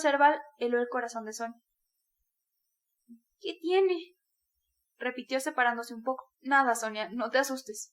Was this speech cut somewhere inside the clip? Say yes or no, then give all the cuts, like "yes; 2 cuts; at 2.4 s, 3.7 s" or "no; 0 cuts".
yes; 1 cut; at 6.3 s